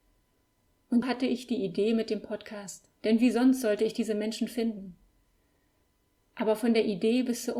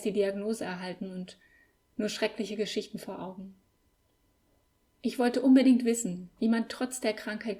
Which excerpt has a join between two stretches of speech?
first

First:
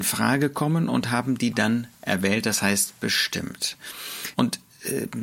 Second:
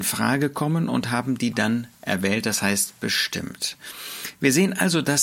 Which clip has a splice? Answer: first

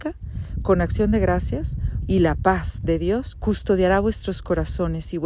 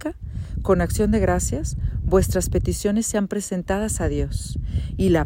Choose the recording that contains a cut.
first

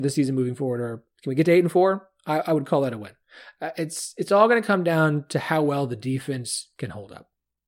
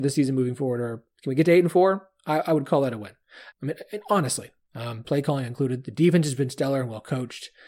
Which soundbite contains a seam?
second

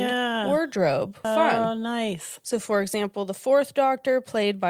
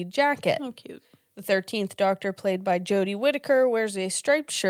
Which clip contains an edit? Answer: first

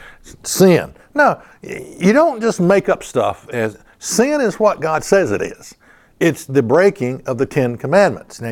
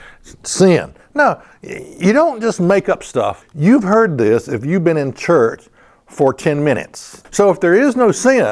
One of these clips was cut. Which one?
second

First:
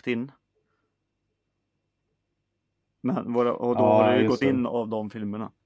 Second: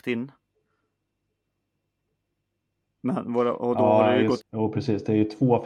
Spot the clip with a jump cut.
second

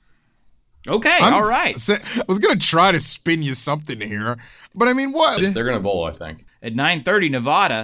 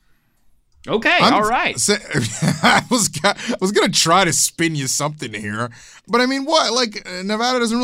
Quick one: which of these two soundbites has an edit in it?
first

